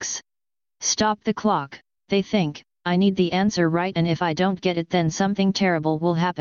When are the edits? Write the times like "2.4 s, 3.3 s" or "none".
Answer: 2.0 s, 3.9 s